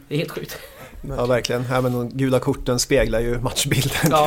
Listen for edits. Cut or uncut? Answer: uncut